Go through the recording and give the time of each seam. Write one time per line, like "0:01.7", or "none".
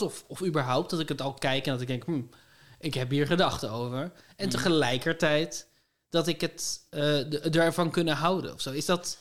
none